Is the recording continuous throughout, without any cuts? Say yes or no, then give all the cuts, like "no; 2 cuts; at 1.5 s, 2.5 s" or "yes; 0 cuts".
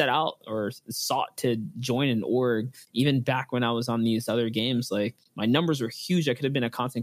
yes; 0 cuts